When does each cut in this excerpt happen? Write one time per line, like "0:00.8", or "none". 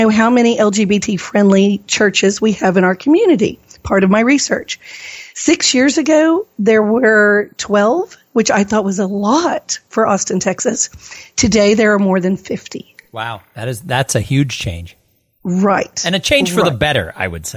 none